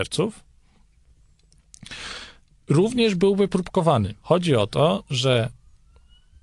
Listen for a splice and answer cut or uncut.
cut